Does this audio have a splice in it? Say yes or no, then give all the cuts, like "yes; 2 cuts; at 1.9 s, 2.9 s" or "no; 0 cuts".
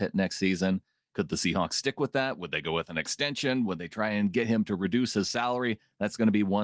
no; 0 cuts